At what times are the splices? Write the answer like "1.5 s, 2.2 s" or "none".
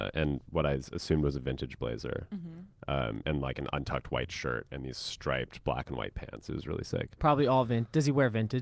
none